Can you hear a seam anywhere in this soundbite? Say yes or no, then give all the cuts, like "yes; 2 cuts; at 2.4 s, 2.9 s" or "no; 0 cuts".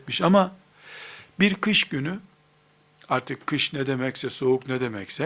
yes; 1 cut; at 3.0 s